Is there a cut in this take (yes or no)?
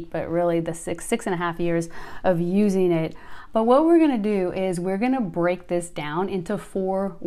yes